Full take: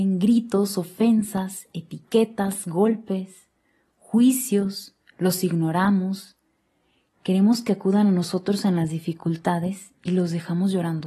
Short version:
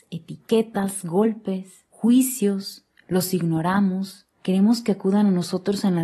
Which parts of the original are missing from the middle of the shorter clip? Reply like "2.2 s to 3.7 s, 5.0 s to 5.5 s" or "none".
3.5 s to 4.0 s, 6.4 s to 7.1 s